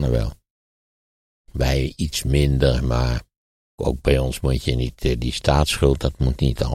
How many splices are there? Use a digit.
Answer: 1